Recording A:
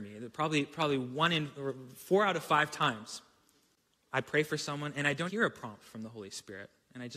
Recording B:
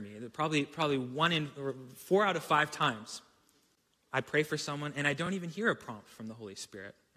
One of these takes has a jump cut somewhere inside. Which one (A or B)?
A